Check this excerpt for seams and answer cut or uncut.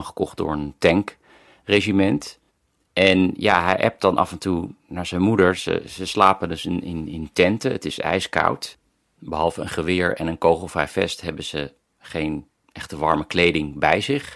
uncut